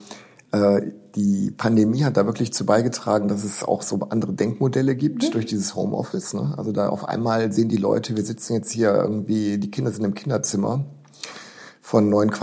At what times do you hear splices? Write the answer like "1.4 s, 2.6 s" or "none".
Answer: none